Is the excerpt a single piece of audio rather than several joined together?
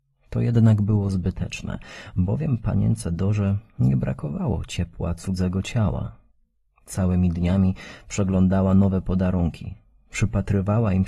yes; 0 cuts

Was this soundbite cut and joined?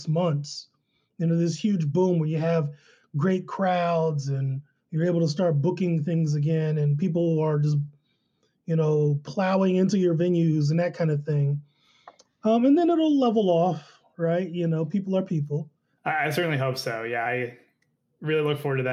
yes; 2 cuts; at 16.0 s, 17.3 s

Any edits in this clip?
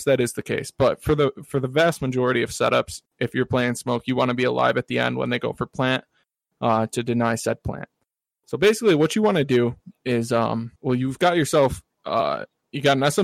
yes; 1 cut; at 10.8 s

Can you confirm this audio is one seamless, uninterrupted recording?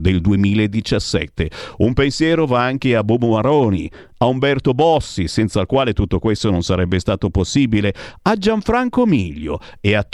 yes; 0 cuts

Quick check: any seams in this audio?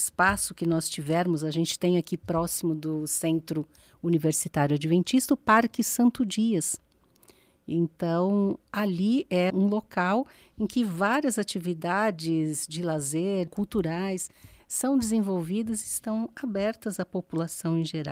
yes; 2 cuts; at 9.5 s, 13.5 s

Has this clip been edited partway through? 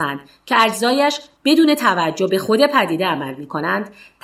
no; 0 cuts

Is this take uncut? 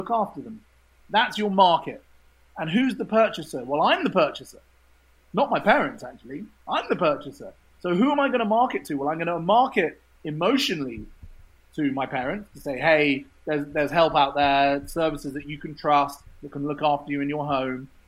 yes; 0 cuts

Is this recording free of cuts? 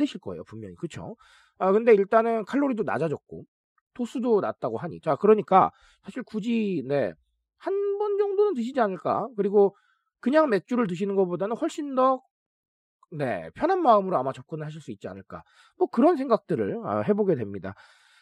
no; 1 cut; at 5.0 s

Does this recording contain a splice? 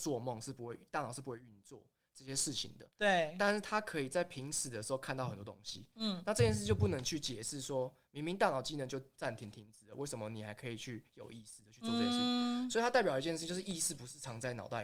no; 0 cuts

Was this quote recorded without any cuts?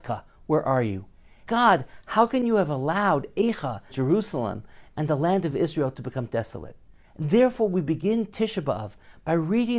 no; 2 cuts; at 1.4 s, 3.9 s

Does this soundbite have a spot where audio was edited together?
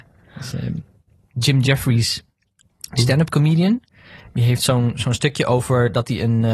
no; 0 cuts

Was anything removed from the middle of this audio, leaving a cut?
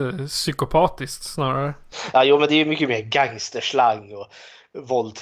no; 0 cuts

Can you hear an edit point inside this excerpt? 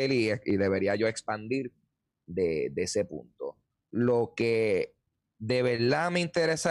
no; 0 cuts

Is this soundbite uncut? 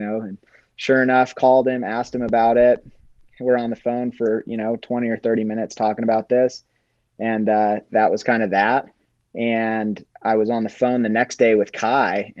yes; 0 cuts

